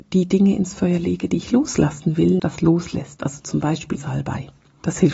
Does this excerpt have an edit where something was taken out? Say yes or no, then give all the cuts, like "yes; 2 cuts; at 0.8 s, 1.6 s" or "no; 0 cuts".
yes; 2 cuts; at 2.4 s, 4.0 s